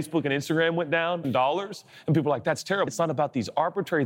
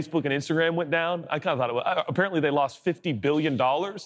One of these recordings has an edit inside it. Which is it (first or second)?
first